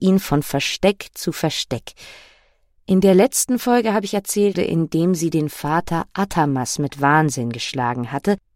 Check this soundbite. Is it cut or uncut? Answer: cut